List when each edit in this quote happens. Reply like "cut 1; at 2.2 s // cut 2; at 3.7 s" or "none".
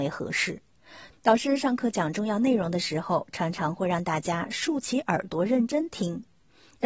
cut 1; at 1.1 s